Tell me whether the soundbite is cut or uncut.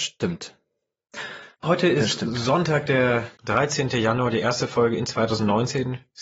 cut